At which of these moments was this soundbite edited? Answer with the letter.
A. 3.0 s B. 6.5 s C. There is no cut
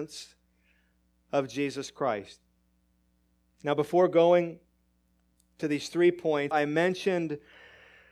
B